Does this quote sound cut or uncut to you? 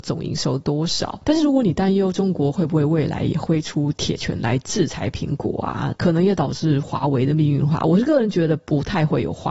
uncut